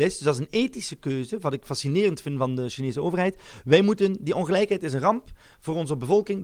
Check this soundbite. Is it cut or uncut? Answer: uncut